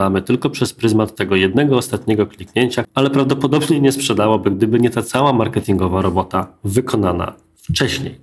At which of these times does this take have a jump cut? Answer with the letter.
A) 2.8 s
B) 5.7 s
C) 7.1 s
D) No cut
A